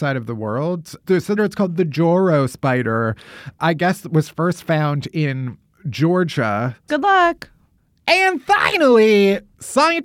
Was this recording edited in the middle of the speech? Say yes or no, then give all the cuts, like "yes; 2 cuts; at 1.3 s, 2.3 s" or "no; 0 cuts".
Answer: yes; 2 cuts; at 1.4 s, 6.9 s